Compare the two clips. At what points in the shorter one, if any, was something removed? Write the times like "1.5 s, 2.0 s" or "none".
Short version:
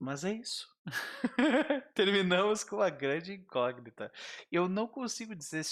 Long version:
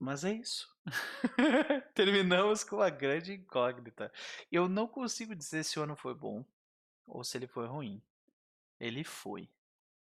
none